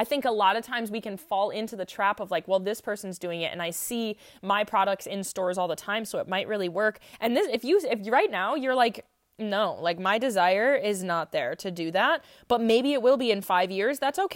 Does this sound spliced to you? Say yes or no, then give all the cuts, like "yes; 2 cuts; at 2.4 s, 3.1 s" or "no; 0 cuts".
no; 0 cuts